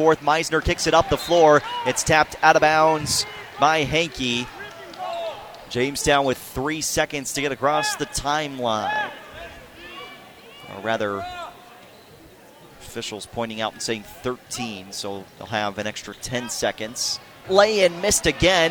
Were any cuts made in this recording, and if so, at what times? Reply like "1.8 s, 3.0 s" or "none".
15.3 s, 17.4 s